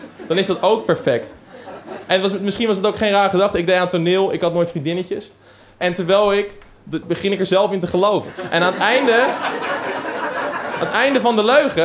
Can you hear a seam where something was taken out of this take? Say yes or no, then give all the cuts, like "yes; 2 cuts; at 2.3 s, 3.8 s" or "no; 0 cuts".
yes; 1 cut; at 7.0 s